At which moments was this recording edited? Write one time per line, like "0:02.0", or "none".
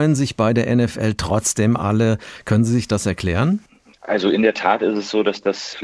none

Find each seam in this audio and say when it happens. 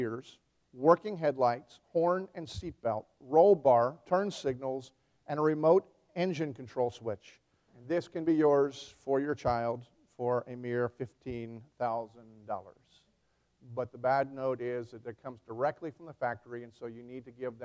0:07.7

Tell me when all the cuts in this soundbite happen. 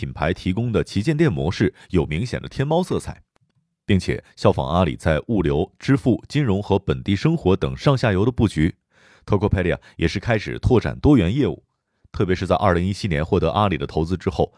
none

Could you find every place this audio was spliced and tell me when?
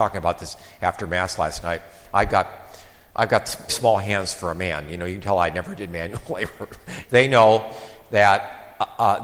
0:03.7
0:07.0

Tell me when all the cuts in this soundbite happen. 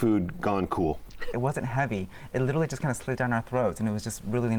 0:01.3

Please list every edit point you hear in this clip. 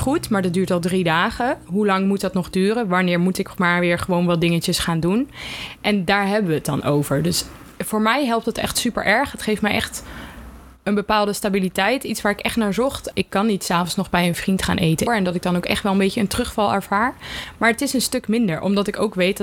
0:13.1
0:15.1

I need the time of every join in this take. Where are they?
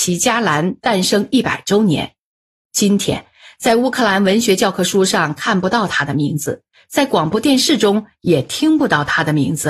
none

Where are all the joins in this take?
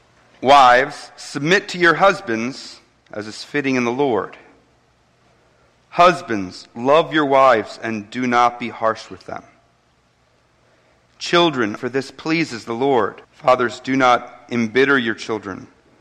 0:11.8
0:13.2

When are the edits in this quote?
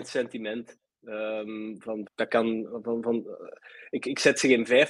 0:02.1

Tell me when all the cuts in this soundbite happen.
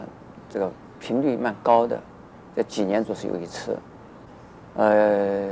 none

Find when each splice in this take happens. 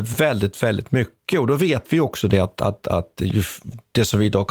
none

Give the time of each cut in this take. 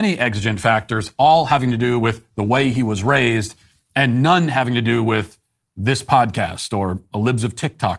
none

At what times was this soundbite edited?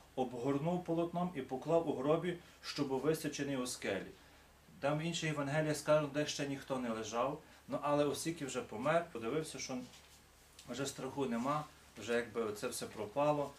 0:07.5

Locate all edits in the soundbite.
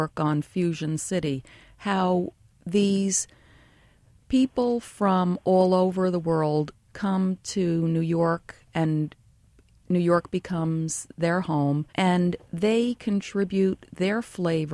0:11.9

